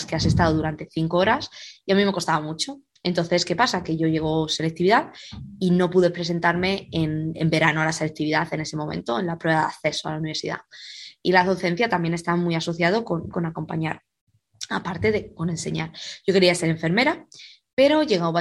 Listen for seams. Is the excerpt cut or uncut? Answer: cut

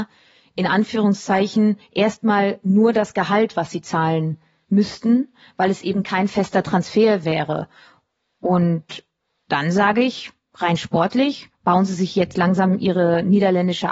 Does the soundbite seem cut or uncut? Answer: uncut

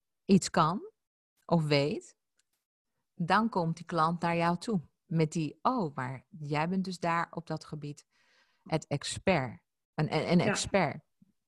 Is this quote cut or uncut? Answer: uncut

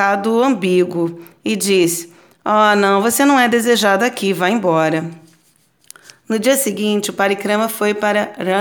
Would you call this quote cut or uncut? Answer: uncut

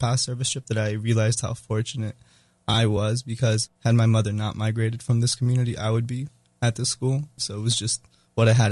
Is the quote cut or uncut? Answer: cut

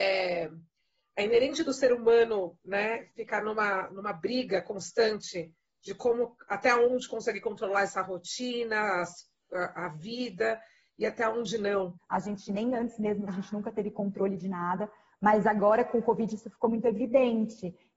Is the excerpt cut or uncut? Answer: cut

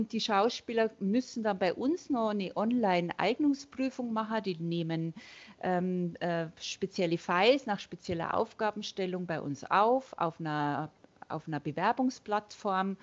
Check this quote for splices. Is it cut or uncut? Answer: uncut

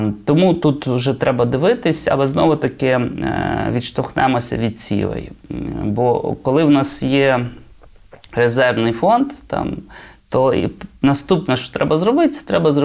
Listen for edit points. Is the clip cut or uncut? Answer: uncut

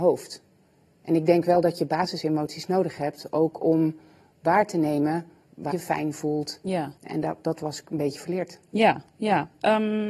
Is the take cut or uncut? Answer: cut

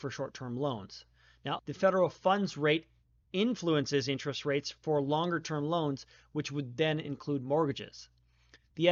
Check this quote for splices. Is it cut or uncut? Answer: cut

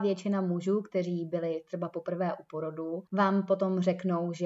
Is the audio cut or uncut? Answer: cut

